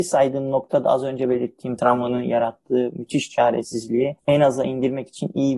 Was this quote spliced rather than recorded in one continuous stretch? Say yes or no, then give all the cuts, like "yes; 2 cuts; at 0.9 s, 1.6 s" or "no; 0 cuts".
yes; 1 cut; at 4.2 s